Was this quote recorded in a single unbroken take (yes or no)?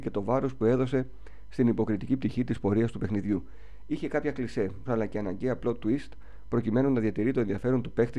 no